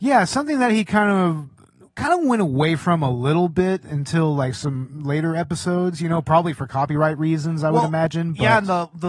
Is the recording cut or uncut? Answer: uncut